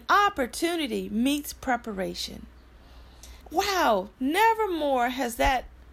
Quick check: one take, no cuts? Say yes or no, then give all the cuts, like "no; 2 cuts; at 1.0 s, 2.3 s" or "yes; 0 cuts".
no; 1 cut; at 3.4 s